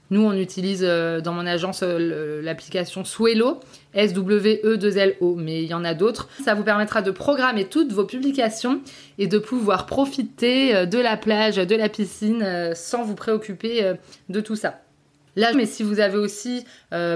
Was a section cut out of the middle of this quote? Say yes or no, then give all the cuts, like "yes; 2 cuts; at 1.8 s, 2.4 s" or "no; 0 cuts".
yes; 2 cuts; at 6.4 s, 15.5 s